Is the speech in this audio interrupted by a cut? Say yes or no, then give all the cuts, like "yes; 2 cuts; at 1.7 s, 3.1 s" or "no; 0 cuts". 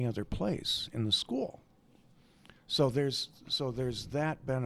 no; 0 cuts